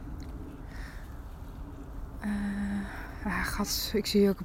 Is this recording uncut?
yes; 0 cuts

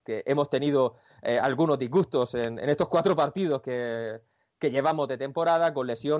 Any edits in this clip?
no; 0 cuts

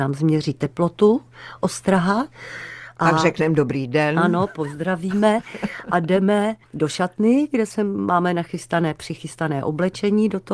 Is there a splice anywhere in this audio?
yes; 1 cut; at 6.6 s

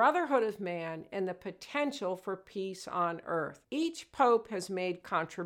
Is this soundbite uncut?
yes; 0 cuts

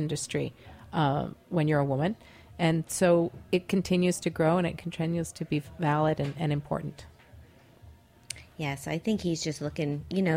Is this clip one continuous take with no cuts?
yes; 0 cuts

